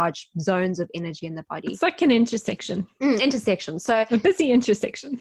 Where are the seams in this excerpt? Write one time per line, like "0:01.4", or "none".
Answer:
none